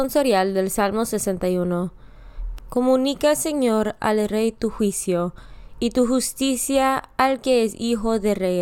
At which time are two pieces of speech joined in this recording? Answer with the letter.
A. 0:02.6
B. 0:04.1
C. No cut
A